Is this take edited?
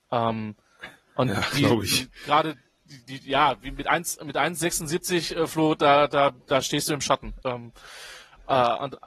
yes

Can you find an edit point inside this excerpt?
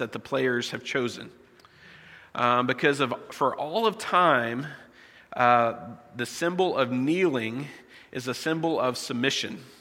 no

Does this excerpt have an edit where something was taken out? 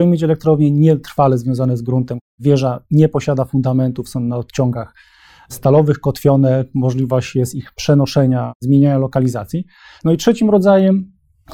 yes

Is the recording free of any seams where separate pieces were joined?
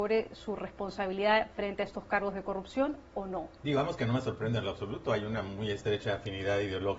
yes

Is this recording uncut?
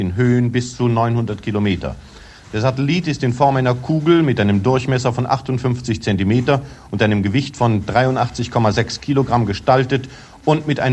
yes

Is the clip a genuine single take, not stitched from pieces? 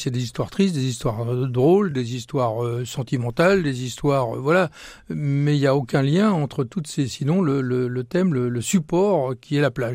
yes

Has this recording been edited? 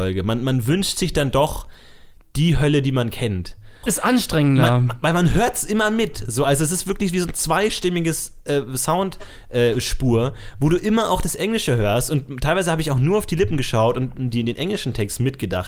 yes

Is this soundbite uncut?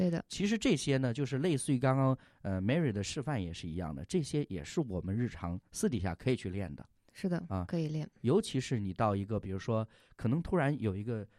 yes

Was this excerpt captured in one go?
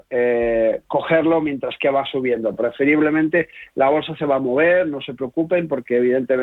yes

